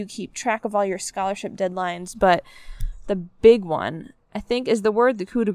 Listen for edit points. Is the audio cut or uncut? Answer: uncut